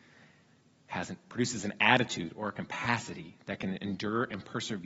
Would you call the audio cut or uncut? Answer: uncut